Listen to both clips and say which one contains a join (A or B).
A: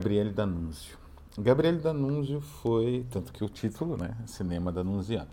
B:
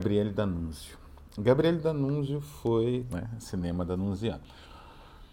B